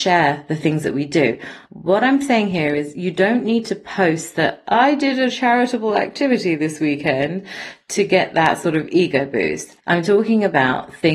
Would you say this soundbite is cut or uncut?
cut